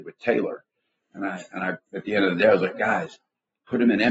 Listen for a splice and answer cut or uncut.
cut